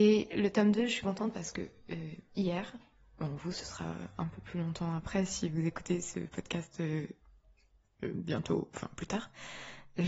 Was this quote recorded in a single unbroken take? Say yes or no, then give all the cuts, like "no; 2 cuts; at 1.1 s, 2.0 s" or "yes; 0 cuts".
yes; 0 cuts